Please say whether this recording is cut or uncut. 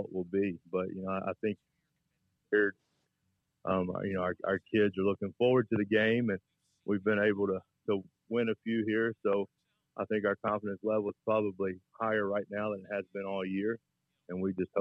uncut